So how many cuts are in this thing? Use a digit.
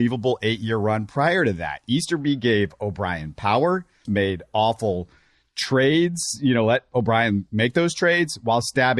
1